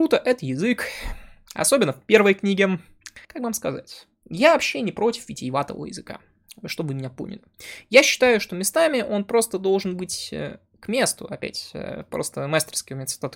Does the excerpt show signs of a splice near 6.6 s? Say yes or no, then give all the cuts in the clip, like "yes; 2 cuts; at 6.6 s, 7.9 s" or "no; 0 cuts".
no; 1 cut; at 3.2 s